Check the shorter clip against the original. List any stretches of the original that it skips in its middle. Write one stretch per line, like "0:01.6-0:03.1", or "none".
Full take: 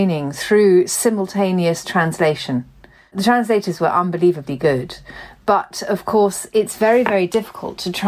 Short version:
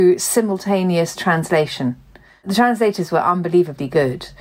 none

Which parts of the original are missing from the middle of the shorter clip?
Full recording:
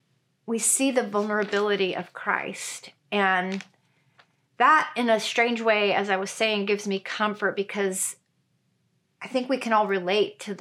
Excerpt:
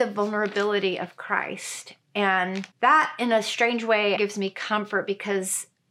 0:03.7-0:04.5
0:05.9-0:06.7

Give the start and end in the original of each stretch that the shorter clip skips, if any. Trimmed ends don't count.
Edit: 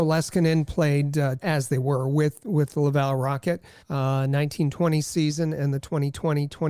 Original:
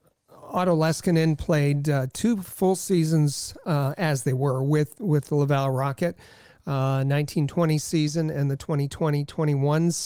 0:02.1-0:04.0
0:06.4-0:06.6

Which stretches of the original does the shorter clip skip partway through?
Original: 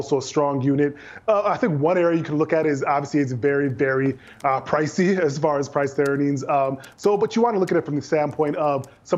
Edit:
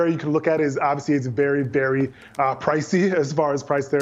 none

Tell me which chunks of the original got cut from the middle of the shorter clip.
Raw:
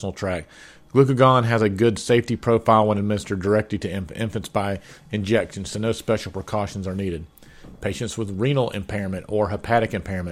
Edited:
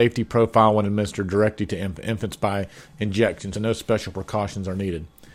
0:05.7-0:05.7

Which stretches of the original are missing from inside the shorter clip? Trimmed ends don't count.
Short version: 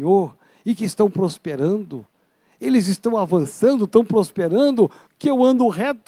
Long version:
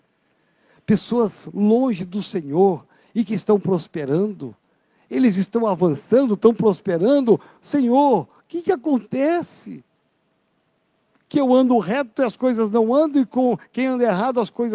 0:07.6-0:11.2

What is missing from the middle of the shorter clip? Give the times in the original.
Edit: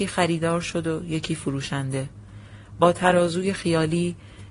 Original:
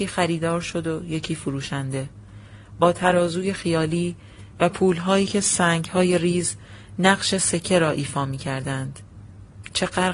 none

